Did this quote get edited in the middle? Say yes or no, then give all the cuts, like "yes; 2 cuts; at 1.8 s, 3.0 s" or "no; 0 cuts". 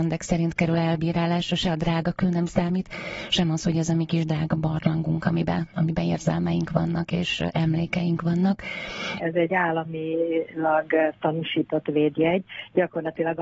yes; 1 cut; at 9.2 s